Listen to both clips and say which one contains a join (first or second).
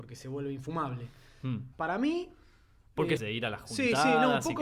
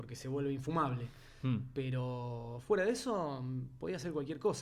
first